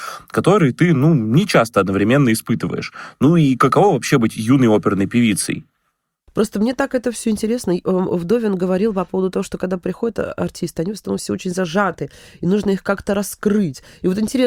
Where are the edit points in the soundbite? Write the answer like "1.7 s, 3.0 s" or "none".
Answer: none